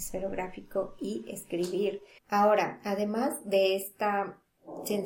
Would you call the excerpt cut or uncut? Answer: cut